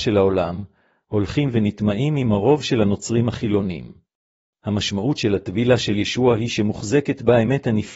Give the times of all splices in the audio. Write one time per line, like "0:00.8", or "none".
0:04.5